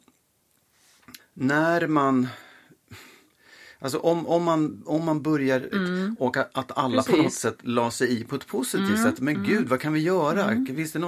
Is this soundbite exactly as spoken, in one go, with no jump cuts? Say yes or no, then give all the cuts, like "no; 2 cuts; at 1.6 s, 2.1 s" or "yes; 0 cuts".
no; 2 cuts; at 1.2 s, 5.7 s